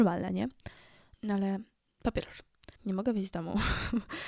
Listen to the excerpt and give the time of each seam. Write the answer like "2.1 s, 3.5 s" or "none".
1.1 s, 2.8 s